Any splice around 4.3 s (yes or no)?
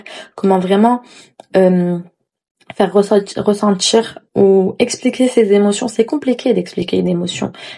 yes